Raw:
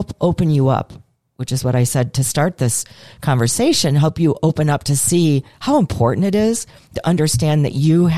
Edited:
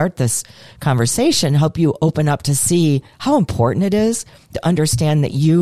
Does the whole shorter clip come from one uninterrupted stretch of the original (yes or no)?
yes